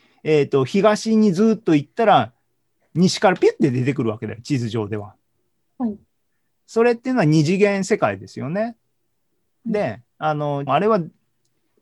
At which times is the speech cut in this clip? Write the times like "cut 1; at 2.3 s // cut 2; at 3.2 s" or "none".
cut 1; at 5.7 s // cut 2; at 10.7 s